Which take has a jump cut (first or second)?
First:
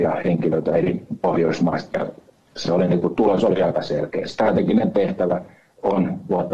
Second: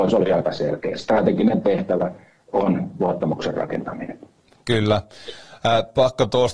first